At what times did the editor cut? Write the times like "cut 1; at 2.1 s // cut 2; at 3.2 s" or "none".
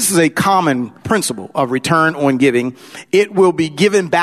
cut 1; at 1.0 s